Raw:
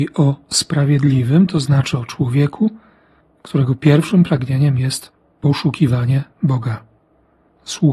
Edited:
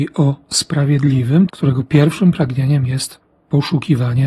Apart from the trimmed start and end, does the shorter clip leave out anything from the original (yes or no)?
yes